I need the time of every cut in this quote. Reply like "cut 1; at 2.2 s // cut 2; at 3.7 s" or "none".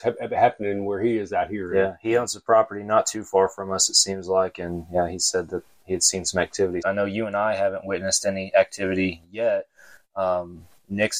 cut 1; at 6.8 s